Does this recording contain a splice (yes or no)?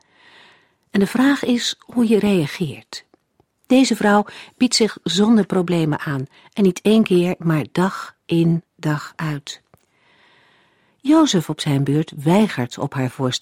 no